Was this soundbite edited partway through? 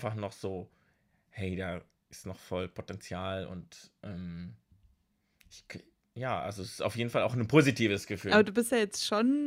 no; 0 cuts

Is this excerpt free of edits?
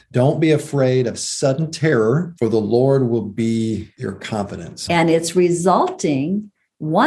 no; 2 cuts; at 2.4 s, 4.9 s

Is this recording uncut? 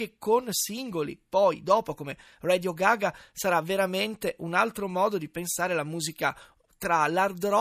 yes; 0 cuts

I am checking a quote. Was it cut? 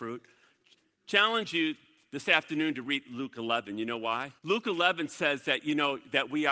yes; 1 cut; at 4.4 s

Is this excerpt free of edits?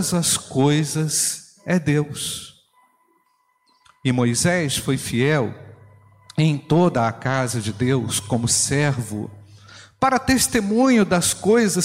yes; 0 cuts

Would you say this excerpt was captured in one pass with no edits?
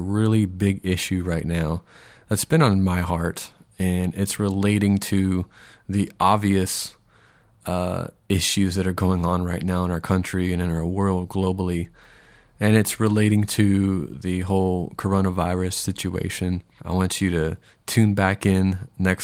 no; 1 cut; at 16.8 s

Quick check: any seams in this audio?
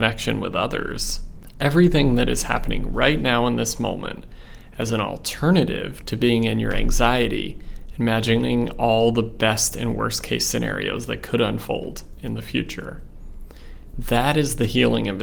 yes; 1 cut; at 13.9 s

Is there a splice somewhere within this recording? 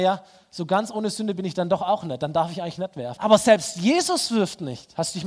yes; 1 cut; at 3.2 s

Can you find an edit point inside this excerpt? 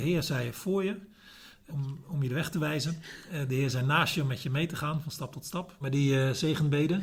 yes; 2 cuts; at 1.7 s, 5.8 s

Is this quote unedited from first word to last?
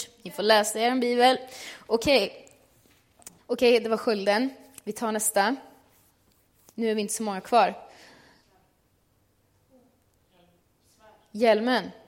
no; 1 cut; at 3.4 s

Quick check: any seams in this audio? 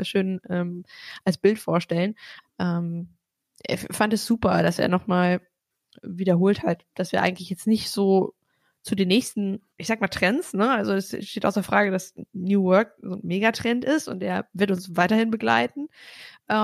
yes; 1 cut; at 2.4 s

